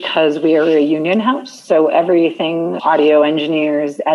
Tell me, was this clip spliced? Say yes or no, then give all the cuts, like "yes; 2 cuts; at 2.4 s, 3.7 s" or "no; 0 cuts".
yes; 1 cut; at 2.8 s